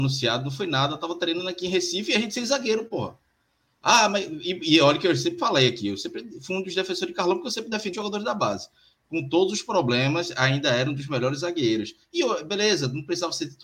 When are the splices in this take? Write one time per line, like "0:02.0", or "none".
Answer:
0:07.9